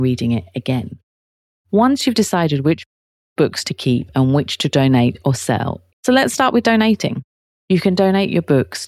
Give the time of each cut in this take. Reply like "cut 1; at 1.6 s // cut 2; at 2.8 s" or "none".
cut 1; at 5.9 s // cut 2; at 7.6 s